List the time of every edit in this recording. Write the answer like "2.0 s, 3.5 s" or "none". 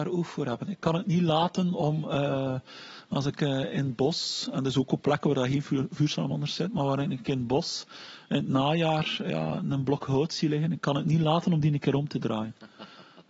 none